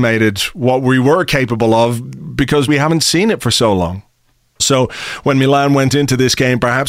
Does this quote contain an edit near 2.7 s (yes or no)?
yes